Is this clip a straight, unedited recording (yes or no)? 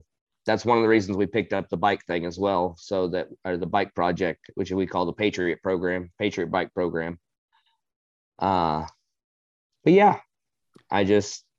yes